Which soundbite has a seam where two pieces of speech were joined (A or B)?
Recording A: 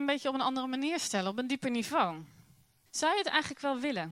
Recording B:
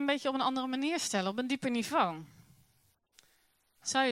A